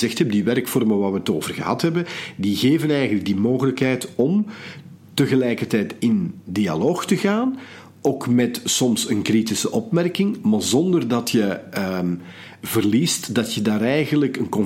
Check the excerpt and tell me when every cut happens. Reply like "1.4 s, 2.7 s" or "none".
none